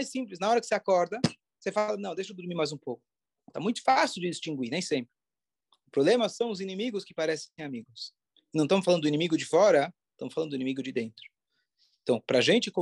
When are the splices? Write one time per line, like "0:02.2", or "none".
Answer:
0:03.5